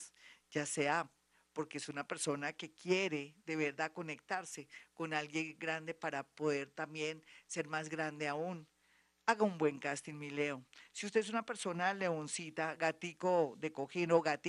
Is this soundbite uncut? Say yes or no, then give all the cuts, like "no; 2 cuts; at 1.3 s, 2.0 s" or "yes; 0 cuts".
yes; 0 cuts